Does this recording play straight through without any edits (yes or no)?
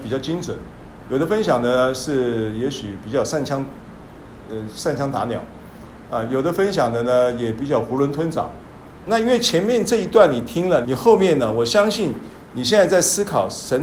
no